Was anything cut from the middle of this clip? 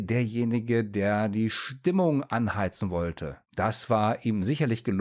yes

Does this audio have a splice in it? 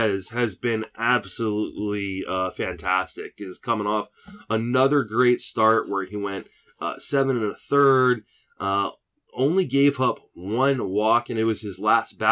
no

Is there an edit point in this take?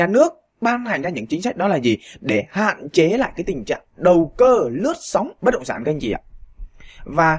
yes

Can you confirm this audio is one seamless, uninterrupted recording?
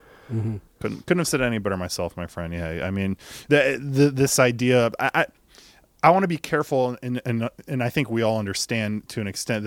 yes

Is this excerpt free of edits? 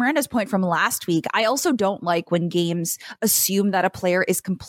yes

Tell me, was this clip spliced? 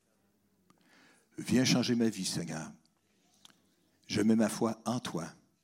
no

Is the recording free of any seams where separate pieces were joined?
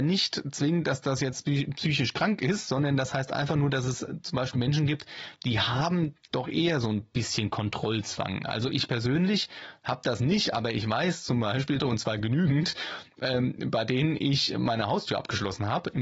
no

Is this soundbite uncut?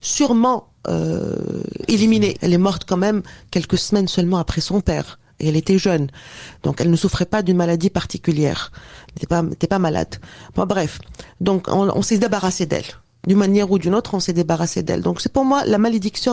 no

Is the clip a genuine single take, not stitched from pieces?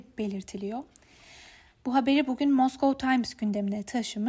yes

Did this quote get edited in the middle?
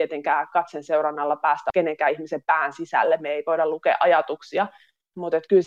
no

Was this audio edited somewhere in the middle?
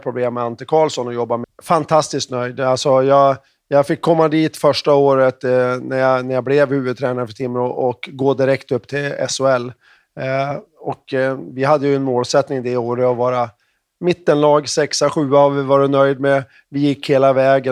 yes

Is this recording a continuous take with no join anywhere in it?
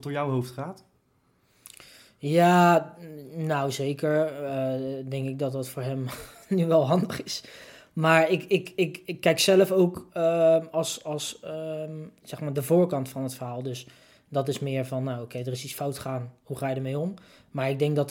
no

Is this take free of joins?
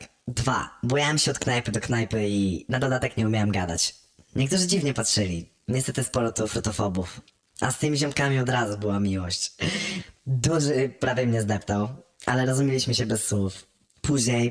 yes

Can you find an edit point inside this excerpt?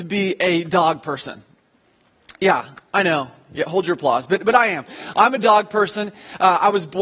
no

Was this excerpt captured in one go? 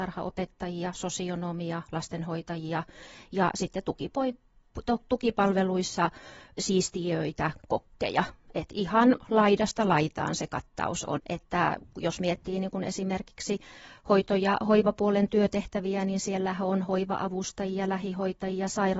no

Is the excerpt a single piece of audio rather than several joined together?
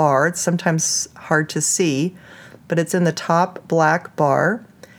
yes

